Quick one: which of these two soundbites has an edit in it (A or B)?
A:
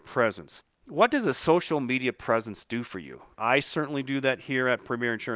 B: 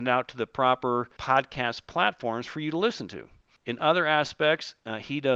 A